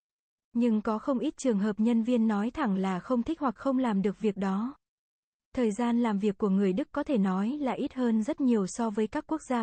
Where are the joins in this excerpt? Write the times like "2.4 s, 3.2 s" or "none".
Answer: none

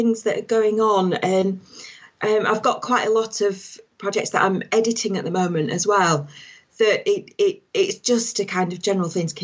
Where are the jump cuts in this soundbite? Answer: 7.7 s

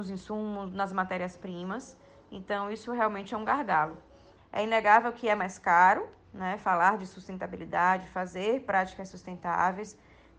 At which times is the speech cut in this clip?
4.4 s

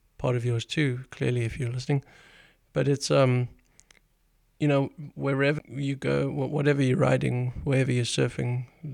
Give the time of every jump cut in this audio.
5.6 s

